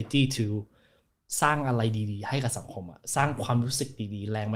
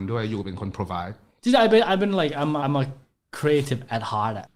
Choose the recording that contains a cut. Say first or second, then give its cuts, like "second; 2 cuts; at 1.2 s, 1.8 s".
second; 1 cut; at 2.6 s